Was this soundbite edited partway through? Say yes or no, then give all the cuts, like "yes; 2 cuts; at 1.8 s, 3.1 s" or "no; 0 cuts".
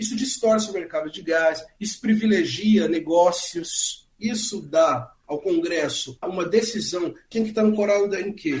yes; 2 cuts; at 6.2 s, 7.3 s